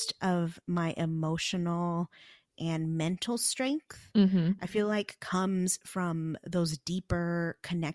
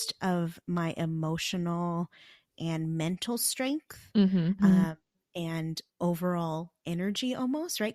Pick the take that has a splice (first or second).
second